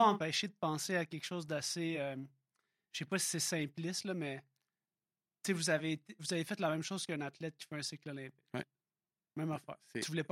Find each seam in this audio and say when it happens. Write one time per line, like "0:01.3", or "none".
none